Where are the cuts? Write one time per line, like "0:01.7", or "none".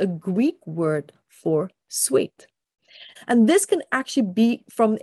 0:03.2